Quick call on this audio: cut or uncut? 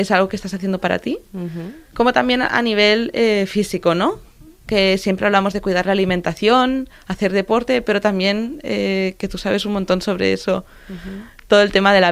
cut